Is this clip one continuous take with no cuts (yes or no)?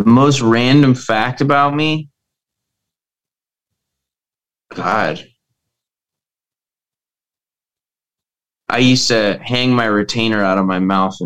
yes